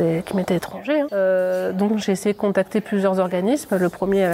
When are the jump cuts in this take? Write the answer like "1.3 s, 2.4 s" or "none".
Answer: 1.1 s